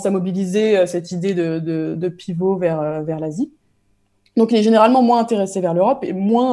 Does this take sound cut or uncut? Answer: uncut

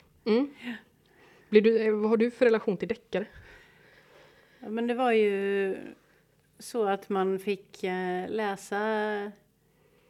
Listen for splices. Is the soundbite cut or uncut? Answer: uncut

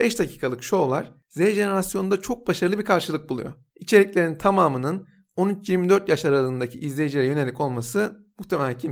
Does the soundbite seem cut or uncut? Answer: cut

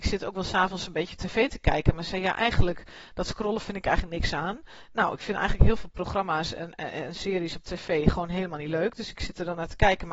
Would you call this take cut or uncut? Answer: uncut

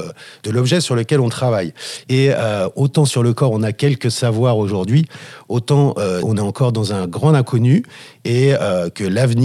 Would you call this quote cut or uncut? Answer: cut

